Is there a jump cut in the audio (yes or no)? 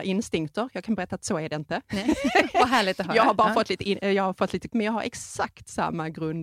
yes